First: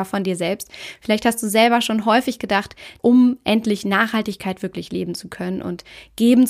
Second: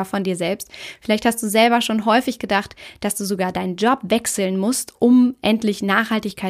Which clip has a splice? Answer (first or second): first